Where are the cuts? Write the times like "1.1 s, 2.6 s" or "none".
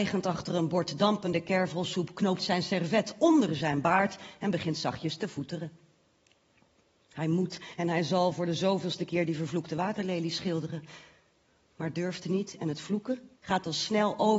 13.4 s